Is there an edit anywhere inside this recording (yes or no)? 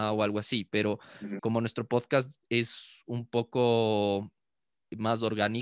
yes